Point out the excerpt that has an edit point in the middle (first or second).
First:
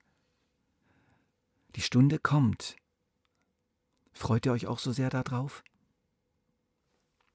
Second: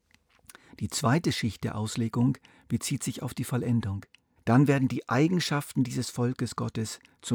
second